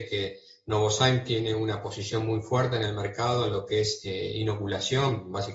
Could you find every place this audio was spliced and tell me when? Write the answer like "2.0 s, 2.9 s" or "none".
none

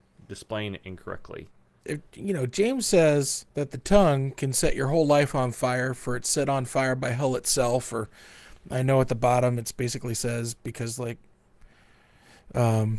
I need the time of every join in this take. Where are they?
1.8 s, 3.5 s

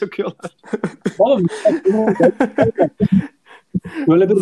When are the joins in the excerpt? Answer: none

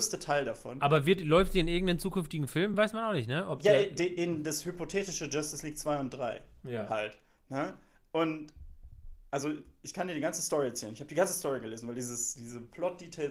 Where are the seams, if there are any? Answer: none

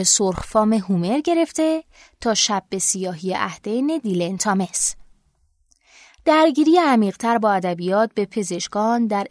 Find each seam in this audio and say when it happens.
none

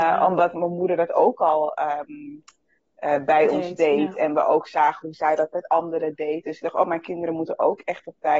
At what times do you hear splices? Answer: 6.4 s

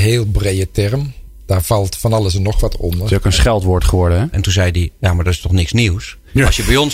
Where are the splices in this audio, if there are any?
4.3 s

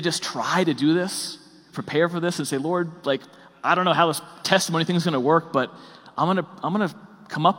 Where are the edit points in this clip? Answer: 1.7 s

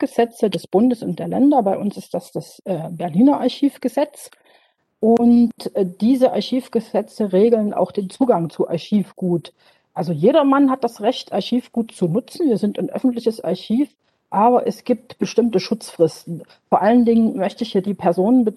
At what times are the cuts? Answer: none

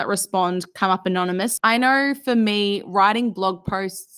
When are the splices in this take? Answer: 1.6 s

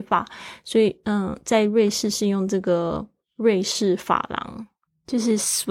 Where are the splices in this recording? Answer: none

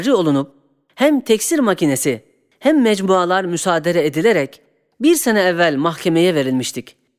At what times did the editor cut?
none

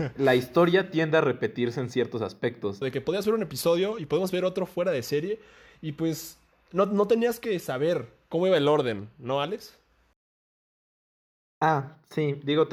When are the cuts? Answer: 2.8 s

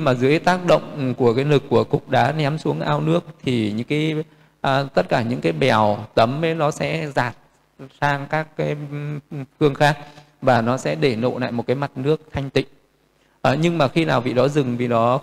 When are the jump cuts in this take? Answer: none

